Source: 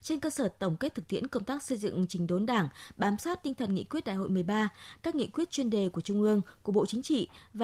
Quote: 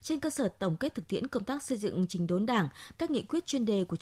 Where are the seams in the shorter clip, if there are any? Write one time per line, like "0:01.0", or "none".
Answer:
0:02.9